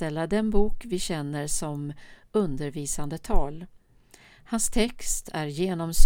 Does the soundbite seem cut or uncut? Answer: uncut